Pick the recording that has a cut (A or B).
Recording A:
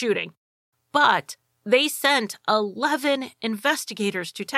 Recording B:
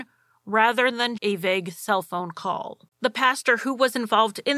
B